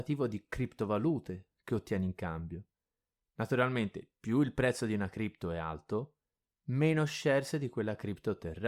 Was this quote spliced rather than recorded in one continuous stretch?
no; 0 cuts

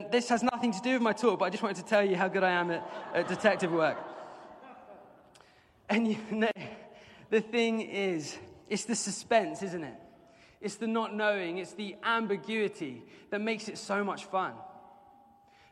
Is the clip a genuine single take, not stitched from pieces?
yes; 0 cuts

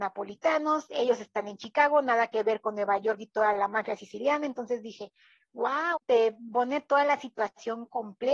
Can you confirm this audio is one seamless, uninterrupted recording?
no; 1 cut; at 5.9 s

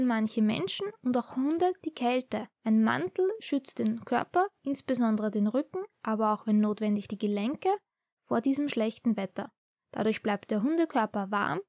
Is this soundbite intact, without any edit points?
no; 1 cut; at 2.5 s

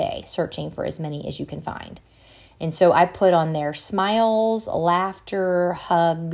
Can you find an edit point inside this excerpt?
no; 0 cuts

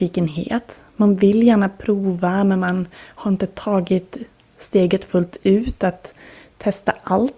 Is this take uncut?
yes; 0 cuts

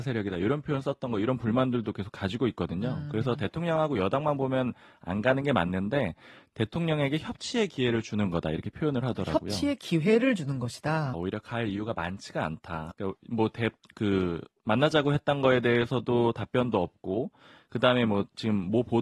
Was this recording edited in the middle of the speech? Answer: yes; 2 cuts; at 11.1 s, 12.9 s

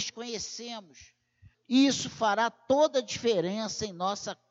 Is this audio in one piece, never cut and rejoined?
no; 1 cut; at 1.5 s

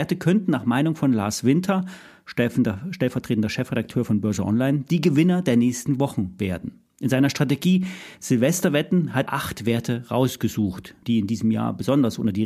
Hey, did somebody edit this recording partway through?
yes; 2 cuts; at 9.3 s, 11.0 s

